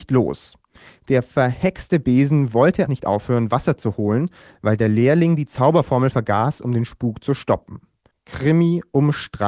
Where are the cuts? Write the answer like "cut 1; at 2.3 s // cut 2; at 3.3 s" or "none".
cut 1; at 2.9 s // cut 2; at 8.1 s